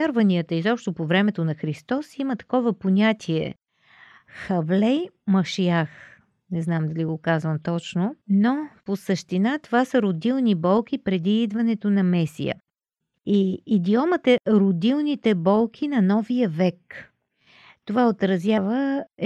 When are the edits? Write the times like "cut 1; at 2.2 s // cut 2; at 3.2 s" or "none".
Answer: cut 1; at 8.2 s // cut 2; at 13.1 s